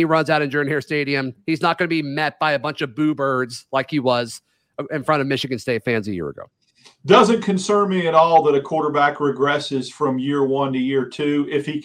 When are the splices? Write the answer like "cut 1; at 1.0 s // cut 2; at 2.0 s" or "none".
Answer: none